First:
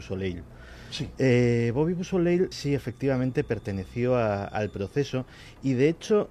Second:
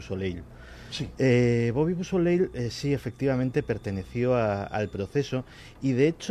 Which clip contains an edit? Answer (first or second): first